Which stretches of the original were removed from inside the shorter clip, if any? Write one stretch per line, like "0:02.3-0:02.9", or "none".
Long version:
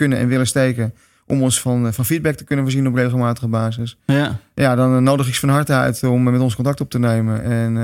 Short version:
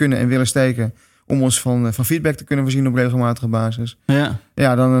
none

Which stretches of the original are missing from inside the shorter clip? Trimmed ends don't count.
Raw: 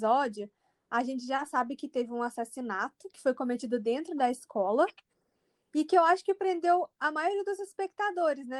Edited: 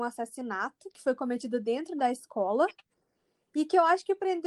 none

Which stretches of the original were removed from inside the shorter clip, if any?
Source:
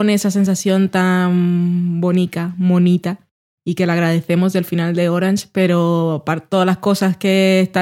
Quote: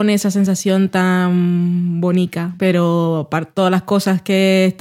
0:02.6-0:05.5

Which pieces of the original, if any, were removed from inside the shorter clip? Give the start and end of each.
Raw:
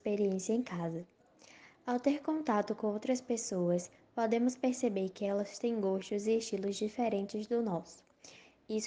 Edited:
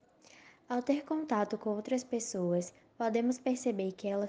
none

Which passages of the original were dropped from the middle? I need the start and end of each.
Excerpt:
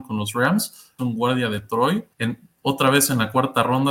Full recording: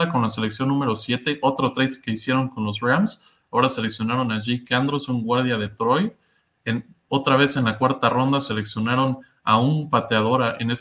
0:03.5-0:05.1
0:06.2-0:06.6

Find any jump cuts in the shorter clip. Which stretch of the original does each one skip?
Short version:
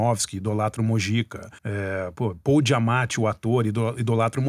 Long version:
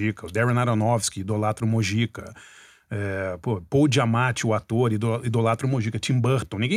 0:02.4-0:02.8

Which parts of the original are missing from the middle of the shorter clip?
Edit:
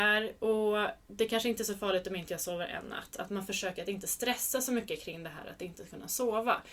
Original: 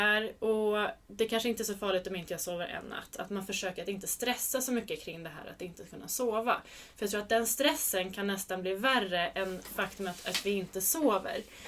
none

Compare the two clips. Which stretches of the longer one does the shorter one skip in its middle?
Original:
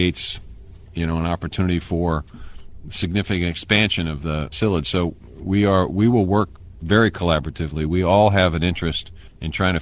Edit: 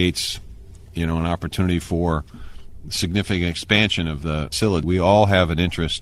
0:04.8-0:07.9

